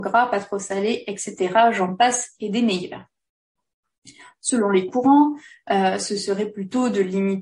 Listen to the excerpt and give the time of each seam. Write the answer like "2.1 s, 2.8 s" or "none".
none

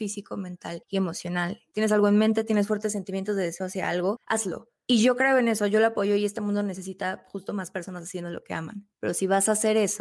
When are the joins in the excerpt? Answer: 1.7 s

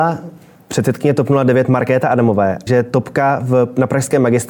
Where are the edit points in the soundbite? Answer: 2.7 s

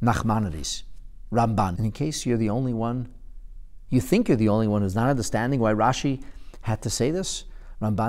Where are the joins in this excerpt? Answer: 1.7 s

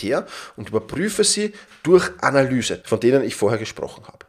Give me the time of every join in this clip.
2.8 s

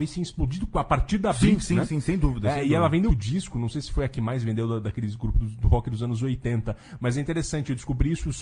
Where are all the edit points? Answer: 3.1 s

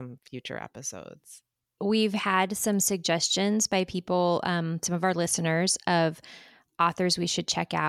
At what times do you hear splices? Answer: 1.8 s

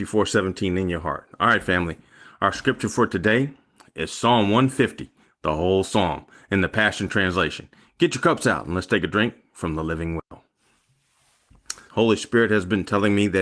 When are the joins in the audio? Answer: 11.9 s

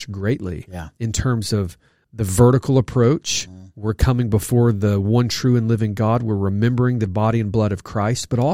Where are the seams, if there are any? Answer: 2.0 s, 7.1 s

